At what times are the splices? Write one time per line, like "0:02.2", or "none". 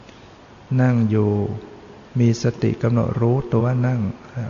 0:02.1
0:03.6